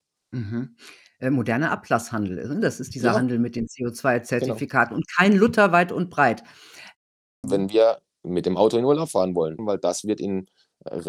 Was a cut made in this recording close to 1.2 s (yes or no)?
no